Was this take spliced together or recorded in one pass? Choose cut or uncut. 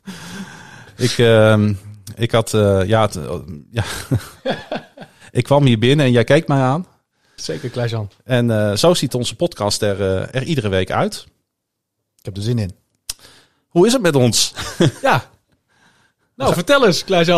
cut